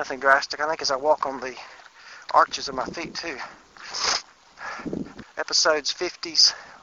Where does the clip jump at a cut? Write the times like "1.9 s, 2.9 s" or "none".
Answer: 5.2 s

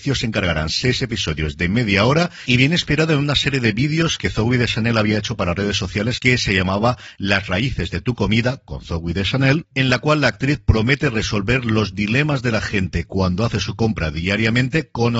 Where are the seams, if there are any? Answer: 6.2 s

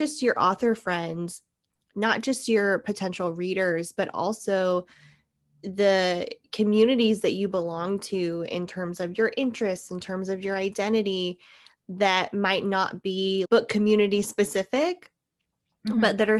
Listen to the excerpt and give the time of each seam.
none

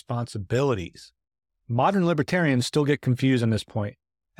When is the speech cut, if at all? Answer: none

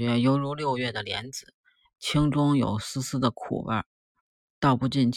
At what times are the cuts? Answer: none

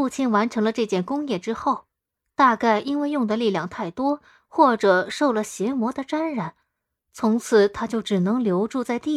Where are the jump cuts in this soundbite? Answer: none

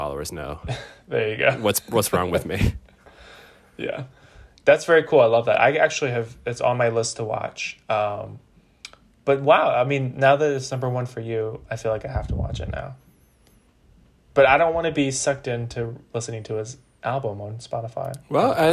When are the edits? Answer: none

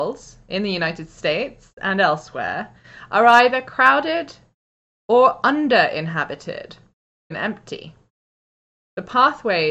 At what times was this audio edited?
7.3 s

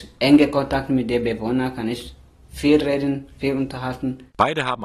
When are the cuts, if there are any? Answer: none

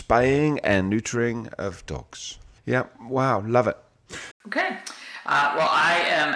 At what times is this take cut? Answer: 2.6 s, 4.3 s

